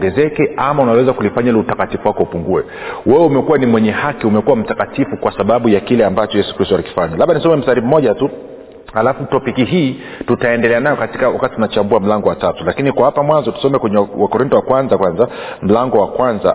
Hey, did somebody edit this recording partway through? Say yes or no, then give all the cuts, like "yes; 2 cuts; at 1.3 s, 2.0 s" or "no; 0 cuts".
no; 0 cuts